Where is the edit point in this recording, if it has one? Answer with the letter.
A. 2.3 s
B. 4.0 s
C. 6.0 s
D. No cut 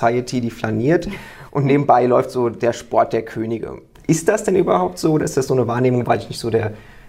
C